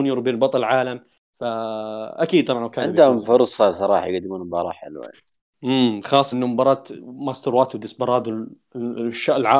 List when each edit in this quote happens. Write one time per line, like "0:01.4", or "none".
0:06.3